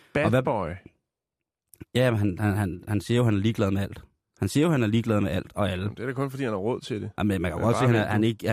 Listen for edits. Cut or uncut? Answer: uncut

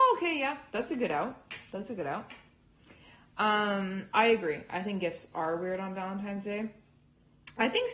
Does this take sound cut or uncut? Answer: uncut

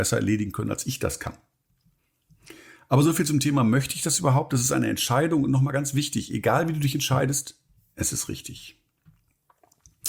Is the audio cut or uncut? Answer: uncut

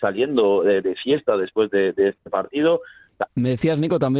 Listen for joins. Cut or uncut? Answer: cut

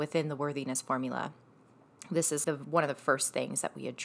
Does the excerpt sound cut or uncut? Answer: cut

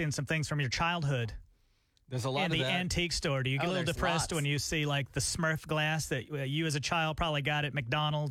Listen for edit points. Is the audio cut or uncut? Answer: uncut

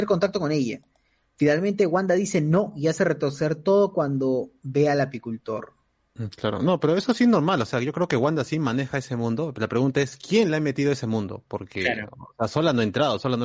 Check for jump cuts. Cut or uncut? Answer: uncut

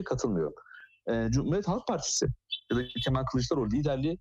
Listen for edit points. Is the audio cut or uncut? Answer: uncut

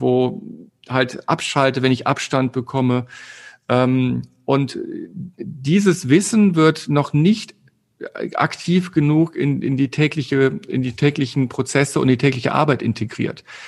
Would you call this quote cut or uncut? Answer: uncut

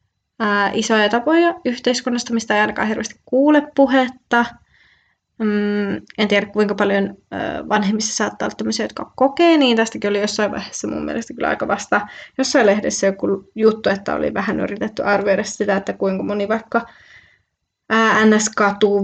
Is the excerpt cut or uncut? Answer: uncut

